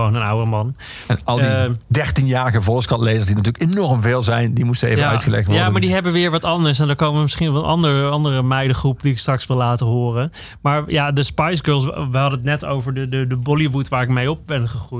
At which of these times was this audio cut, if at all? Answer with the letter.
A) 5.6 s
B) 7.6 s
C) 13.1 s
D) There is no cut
D